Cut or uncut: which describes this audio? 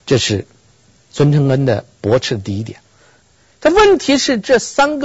cut